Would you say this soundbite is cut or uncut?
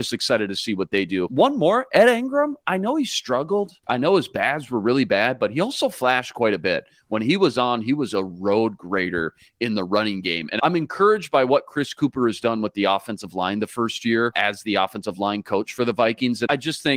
uncut